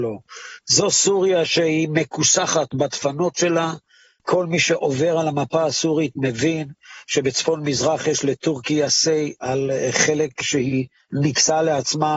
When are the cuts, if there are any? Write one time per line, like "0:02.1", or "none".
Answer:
none